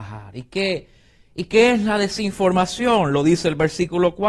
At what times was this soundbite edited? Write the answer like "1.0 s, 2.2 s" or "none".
none